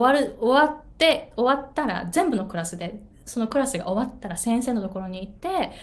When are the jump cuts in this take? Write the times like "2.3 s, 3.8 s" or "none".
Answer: 1.3 s